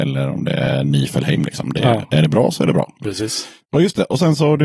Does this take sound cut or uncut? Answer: uncut